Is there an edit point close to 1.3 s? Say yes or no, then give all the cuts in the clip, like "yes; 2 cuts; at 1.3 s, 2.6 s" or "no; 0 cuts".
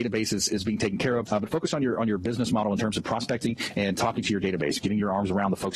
yes; 1 cut; at 1.3 s